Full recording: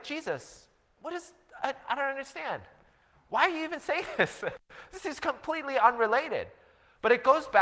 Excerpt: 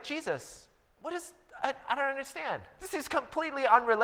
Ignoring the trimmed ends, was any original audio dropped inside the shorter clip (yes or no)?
yes